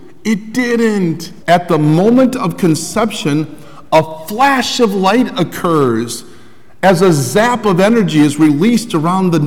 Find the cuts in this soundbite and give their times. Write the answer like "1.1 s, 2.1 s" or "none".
1.4 s